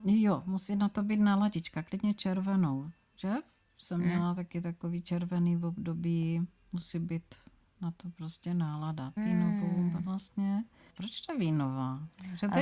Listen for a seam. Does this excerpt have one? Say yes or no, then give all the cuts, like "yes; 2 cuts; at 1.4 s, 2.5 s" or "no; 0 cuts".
yes; 1 cut; at 9.2 s